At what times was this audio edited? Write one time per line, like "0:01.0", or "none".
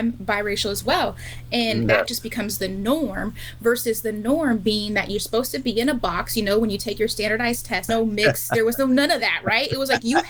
0:01.9
0:07.9